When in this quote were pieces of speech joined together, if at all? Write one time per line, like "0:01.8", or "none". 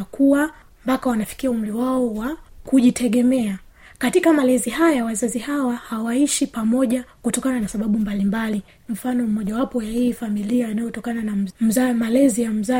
0:08.8

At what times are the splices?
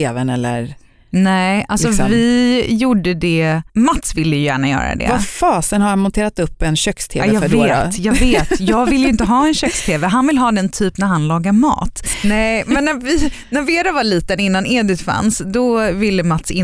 0:03.7
0:12.2

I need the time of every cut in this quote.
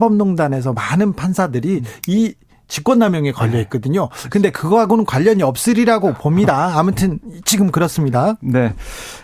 none

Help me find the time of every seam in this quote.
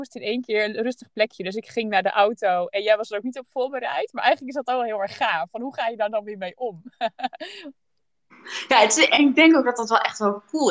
none

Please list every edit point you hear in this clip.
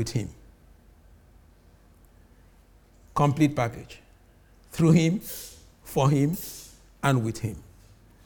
none

